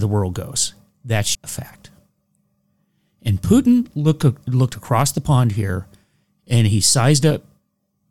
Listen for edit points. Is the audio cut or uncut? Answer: cut